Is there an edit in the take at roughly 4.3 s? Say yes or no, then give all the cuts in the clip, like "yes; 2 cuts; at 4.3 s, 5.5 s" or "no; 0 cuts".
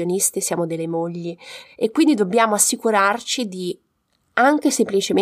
no; 1 cut; at 1.6 s